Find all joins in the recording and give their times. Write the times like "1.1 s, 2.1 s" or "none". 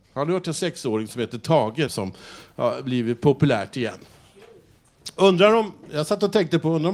1.9 s